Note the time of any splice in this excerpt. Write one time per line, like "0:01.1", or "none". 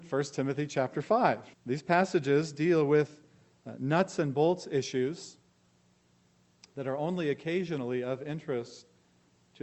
0:01.5